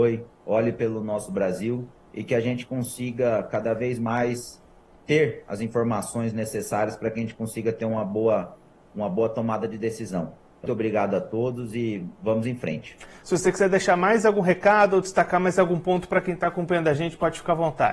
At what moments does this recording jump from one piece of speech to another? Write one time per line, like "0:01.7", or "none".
0:10.7
0:13.2